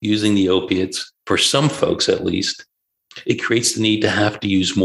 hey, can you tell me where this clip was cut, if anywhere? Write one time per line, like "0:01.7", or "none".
0:01.2